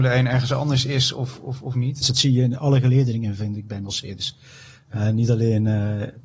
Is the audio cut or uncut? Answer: cut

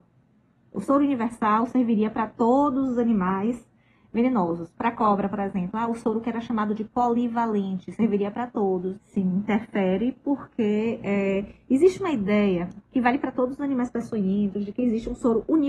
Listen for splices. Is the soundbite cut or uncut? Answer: cut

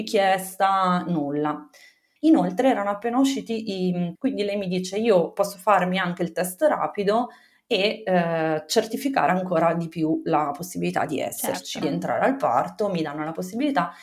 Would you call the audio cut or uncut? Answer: cut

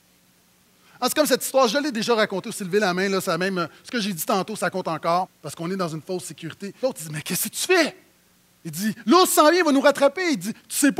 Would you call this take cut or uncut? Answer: cut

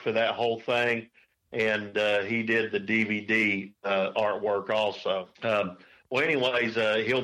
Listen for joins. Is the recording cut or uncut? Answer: cut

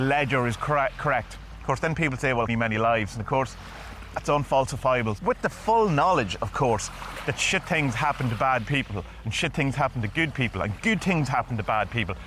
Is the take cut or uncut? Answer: cut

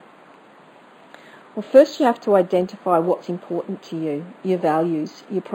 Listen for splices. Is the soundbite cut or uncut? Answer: uncut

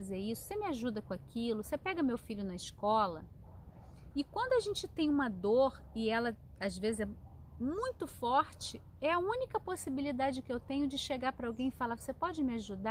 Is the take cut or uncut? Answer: cut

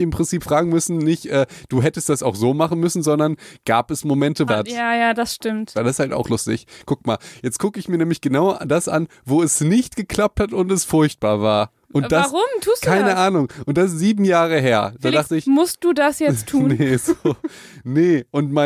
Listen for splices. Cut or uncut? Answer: cut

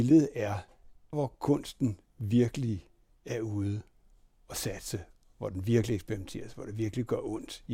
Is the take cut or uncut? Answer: cut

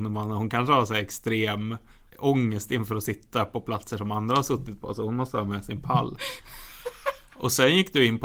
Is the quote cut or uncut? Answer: uncut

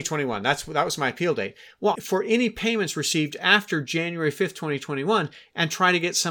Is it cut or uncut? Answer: cut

